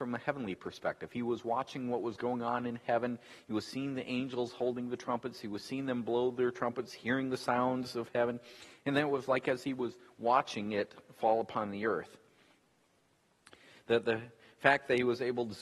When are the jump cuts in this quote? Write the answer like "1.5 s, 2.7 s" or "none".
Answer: none